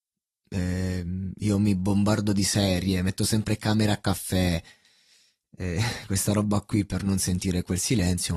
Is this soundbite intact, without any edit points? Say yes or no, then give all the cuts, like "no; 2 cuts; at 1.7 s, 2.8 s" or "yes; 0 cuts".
yes; 0 cuts